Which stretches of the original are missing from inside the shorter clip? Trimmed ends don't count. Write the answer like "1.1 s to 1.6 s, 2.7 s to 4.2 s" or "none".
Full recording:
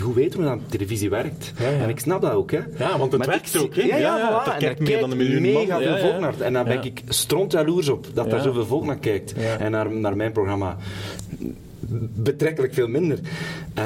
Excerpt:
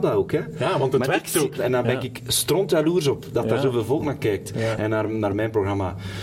3.7 s to 6.4 s